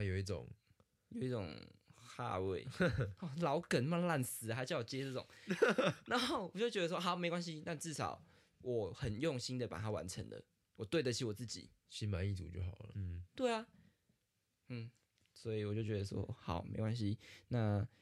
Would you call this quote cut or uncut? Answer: cut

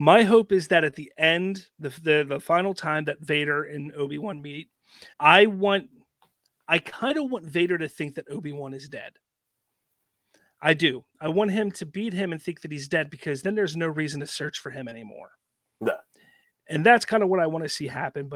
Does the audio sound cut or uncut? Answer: cut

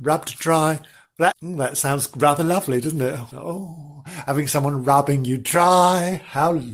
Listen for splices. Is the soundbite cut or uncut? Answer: cut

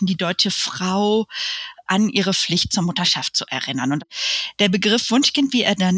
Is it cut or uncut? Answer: uncut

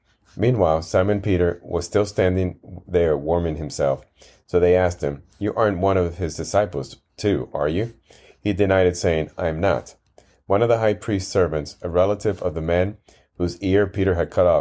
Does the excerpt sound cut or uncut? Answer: uncut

